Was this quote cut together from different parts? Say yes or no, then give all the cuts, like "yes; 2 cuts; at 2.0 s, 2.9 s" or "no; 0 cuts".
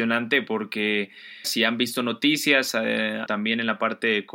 yes; 2 cuts; at 1.4 s, 3.3 s